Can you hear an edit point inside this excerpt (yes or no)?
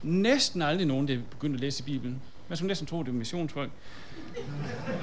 no